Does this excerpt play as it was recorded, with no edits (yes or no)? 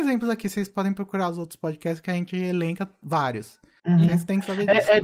no